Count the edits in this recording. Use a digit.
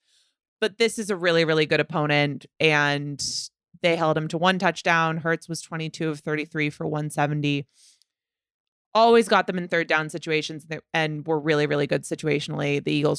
0